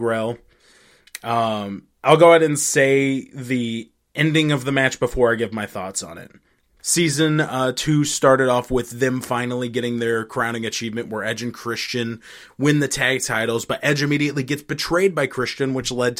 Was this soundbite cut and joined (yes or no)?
yes